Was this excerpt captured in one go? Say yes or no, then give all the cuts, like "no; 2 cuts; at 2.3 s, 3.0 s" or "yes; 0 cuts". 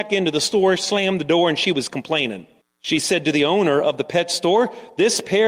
no; 1 cut; at 2.6 s